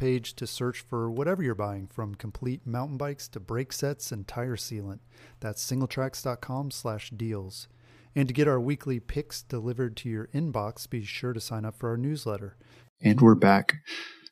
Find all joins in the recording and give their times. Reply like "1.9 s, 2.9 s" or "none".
12.8 s

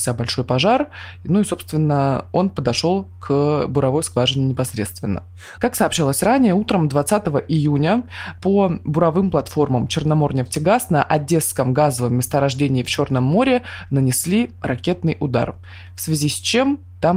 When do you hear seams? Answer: 5.6 s

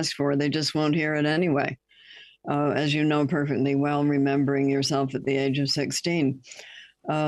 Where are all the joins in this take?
none

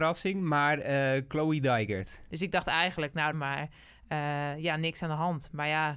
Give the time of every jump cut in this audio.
2.3 s, 3.3 s

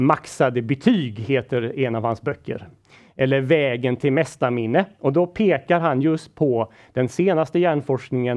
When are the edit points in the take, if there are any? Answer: none

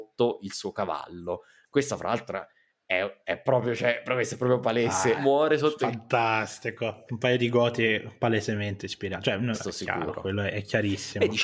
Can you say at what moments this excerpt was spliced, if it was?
5.2 s, 7.1 s, 9.5 s

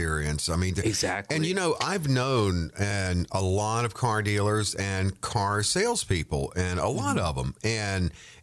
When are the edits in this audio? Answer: none

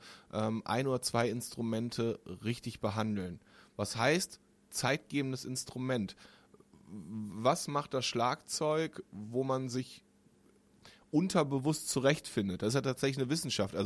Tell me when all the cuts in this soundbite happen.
none

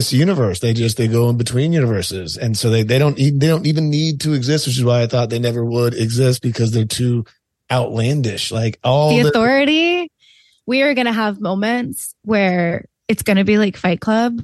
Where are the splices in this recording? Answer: none

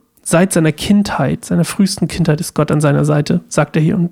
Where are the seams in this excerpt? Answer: none

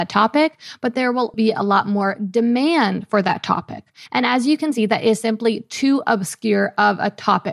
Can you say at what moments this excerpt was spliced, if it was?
1.3 s, 4.1 s

